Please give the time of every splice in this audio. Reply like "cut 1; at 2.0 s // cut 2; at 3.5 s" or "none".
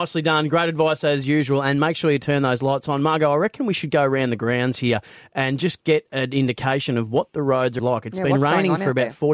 cut 1; at 7.8 s